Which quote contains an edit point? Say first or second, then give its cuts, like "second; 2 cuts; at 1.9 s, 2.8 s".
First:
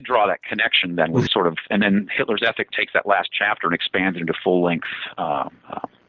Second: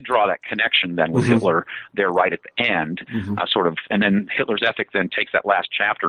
first; 2 cuts; at 1.3 s, 2.7 s